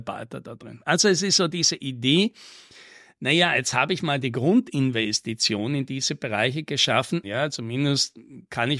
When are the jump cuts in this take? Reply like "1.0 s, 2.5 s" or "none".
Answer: 7.2 s